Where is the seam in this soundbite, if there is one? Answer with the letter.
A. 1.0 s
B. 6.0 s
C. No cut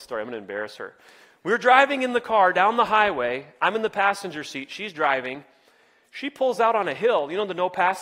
C